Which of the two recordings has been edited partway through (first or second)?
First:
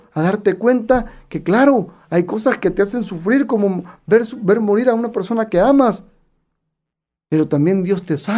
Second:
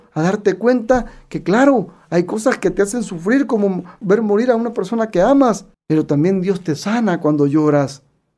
second